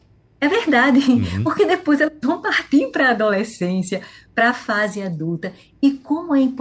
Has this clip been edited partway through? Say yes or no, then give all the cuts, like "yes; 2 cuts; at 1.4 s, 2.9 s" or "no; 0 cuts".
no; 0 cuts